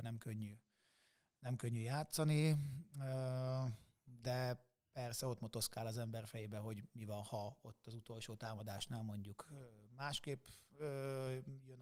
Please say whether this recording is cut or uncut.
uncut